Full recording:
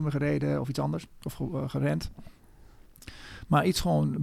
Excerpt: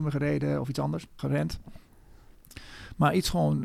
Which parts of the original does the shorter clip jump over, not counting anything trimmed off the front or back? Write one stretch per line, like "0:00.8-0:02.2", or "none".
0:01.2-0:01.7